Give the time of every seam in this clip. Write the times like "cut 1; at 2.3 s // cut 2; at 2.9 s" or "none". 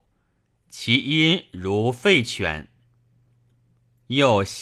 none

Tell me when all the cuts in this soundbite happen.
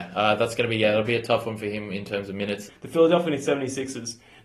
cut 1; at 2.7 s

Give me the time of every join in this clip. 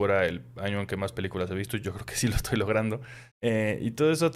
cut 1; at 3.3 s

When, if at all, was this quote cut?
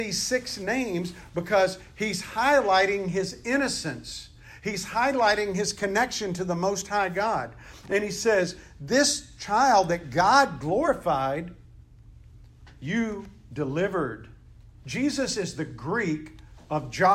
cut 1; at 14.8 s

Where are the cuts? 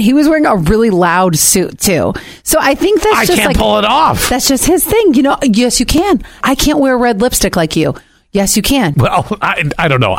cut 1; at 6.4 s // cut 2; at 8.9 s

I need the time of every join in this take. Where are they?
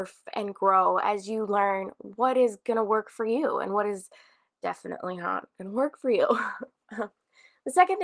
none

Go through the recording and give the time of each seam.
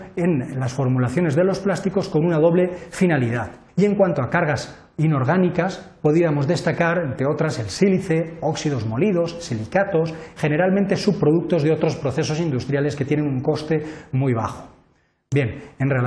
cut 1; at 3.7 s // cut 2; at 10.4 s

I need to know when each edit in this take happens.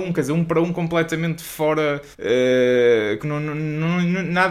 cut 1; at 2.1 s // cut 2; at 3.2 s

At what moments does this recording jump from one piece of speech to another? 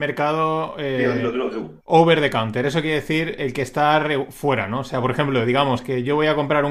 none

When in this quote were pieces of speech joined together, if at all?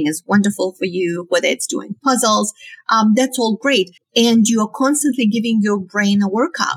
cut 1; at 4.0 s

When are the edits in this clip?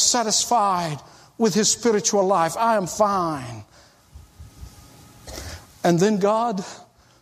none

